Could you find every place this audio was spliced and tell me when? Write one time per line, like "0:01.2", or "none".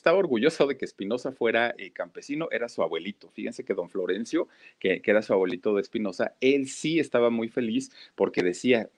none